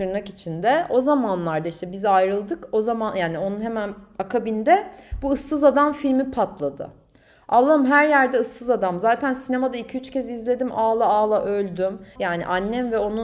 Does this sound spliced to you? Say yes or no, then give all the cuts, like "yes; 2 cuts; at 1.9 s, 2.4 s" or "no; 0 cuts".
yes; 1 cut; at 12.2 s